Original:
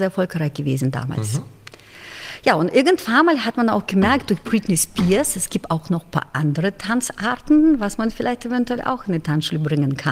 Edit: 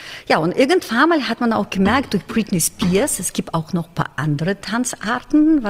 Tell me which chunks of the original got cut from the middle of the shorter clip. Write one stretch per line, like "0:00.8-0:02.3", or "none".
none